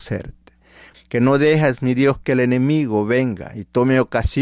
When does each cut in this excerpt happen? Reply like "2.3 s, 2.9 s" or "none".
0.9 s